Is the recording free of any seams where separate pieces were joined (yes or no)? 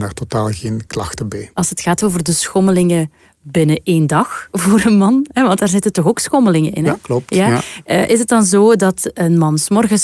no